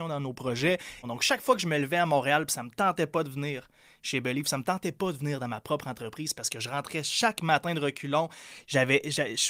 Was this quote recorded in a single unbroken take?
no; 1 cut; at 1.0 s

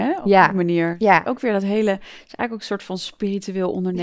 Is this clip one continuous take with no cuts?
yes; 0 cuts

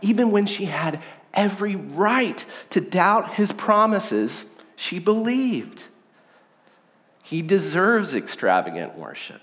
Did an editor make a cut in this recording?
yes; 1 cut; at 7.2 s

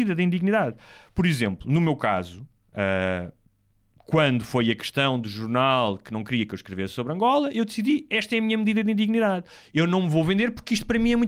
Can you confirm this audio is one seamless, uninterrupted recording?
yes; 0 cuts

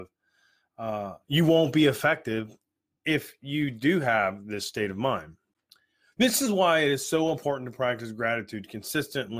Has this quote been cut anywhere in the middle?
no; 0 cuts

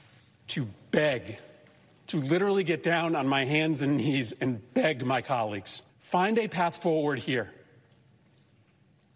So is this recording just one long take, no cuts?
no; 1 cut; at 5.9 s

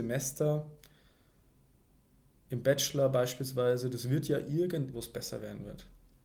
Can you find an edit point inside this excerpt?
yes; 1 cut; at 4.9 s

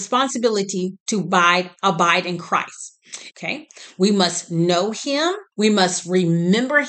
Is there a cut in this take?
yes; 2 cuts; at 3.3 s, 5.5 s

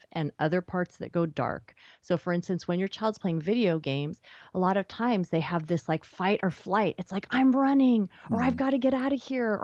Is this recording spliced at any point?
no; 0 cuts

